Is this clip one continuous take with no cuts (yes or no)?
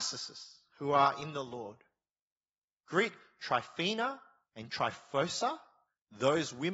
yes